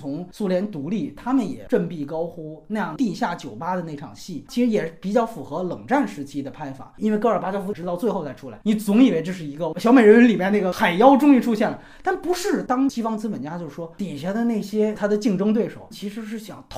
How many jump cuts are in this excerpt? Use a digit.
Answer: 1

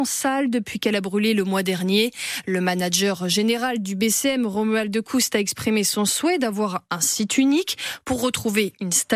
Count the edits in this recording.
0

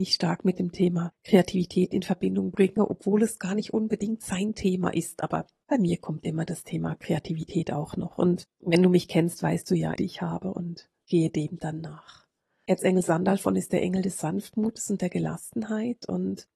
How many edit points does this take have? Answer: 1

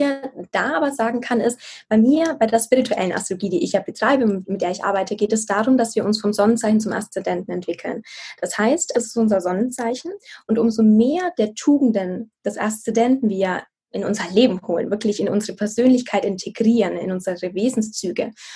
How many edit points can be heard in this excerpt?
1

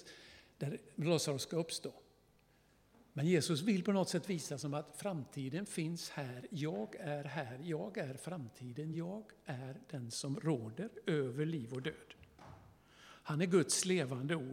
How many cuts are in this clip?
0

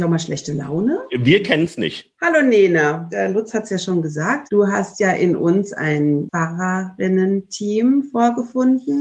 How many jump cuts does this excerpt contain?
1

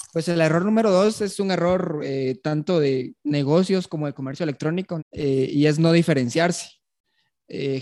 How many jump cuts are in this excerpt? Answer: 1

